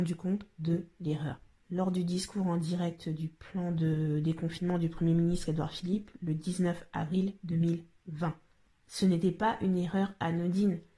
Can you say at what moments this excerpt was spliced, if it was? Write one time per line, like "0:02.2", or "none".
0:01.6